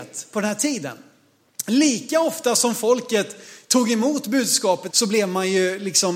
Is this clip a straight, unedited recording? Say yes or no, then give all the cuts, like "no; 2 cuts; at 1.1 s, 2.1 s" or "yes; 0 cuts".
no; 1 cut; at 4.9 s